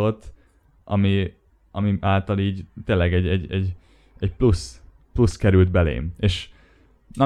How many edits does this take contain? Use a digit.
0